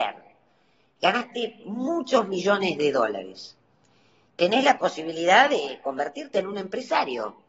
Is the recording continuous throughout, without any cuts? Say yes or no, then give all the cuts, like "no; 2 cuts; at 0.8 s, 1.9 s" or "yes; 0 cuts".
yes; 0 cuts